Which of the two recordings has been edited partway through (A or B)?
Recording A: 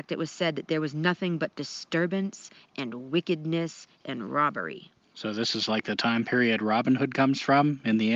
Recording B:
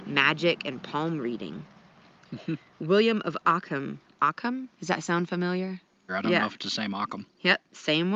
B